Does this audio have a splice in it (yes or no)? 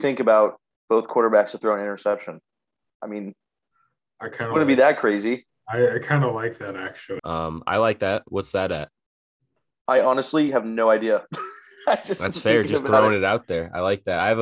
yes